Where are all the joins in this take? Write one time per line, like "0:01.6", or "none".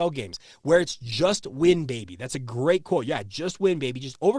none